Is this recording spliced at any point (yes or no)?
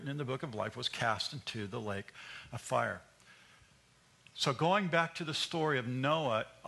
no